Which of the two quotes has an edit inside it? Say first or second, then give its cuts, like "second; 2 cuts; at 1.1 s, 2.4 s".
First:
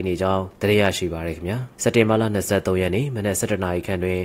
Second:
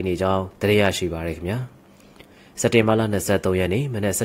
first; 1 cut; at 1.7 s